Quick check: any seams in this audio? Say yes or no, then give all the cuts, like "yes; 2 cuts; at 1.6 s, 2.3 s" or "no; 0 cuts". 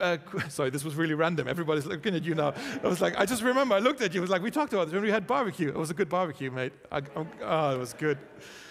no; 0 cuts